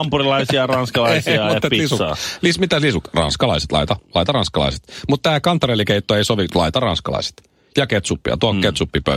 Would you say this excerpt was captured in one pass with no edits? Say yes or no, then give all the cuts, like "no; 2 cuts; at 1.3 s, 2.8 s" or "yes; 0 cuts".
yes; 0 cuts